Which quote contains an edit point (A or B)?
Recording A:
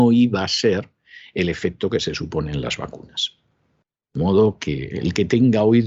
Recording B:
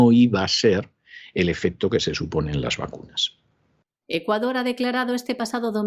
B